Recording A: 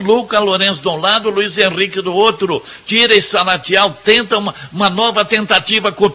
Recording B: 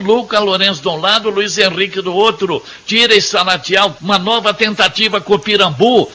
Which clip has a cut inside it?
B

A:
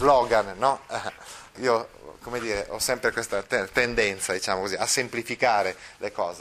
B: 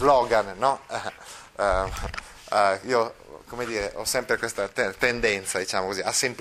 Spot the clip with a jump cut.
A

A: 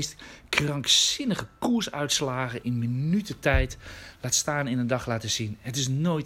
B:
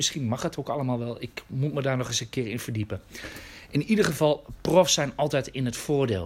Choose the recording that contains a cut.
A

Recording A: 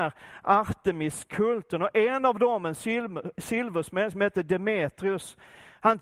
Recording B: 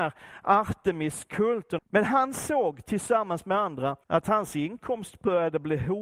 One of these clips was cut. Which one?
B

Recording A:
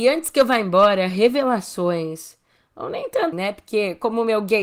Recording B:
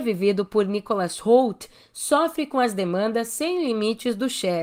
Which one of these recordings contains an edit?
A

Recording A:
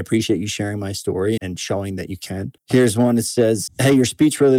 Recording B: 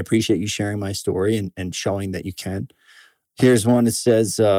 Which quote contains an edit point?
A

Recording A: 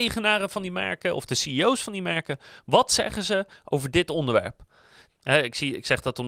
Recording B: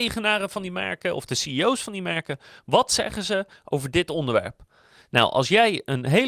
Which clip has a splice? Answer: A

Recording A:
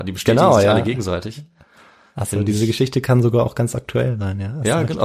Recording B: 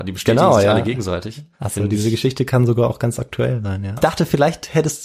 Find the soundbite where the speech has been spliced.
B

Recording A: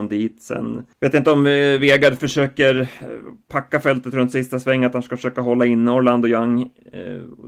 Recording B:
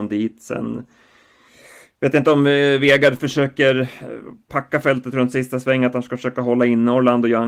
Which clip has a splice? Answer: A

